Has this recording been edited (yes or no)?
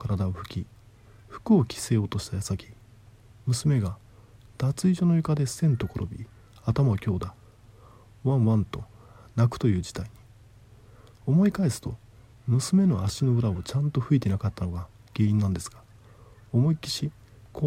no